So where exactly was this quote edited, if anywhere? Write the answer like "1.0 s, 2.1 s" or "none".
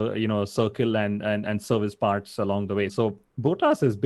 2.9 s